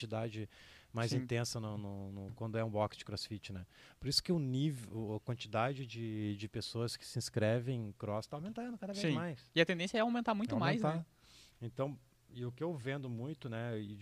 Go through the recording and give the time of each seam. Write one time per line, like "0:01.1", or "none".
none

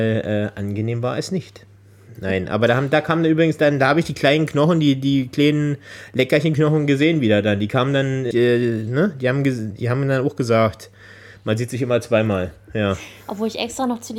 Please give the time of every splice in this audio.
0:08.3

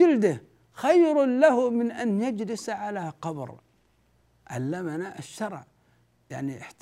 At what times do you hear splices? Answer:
none

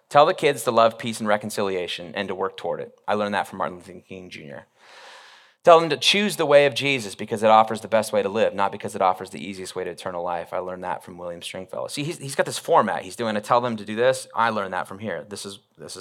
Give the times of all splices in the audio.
none

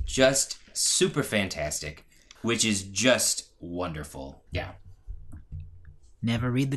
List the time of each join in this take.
0:02.4
0:04.5

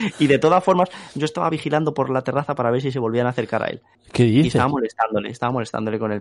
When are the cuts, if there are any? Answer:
0:04.0

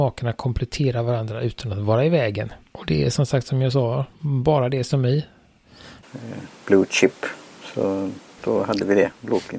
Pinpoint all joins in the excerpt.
0:02.7
0:06.0

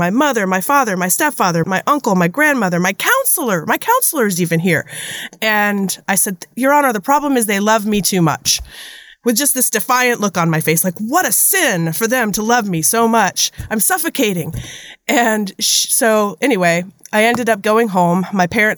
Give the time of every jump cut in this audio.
0:01.6

